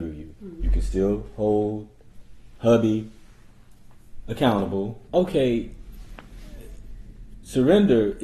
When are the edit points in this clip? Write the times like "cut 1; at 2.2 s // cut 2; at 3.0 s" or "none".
cut 1; at 5.1 s